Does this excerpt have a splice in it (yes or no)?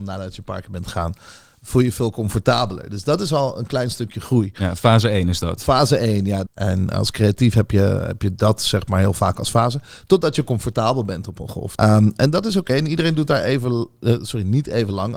yes